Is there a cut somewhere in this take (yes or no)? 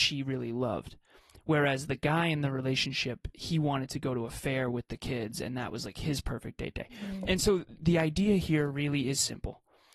no